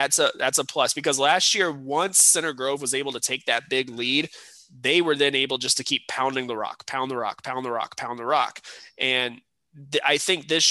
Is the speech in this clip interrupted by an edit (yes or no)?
no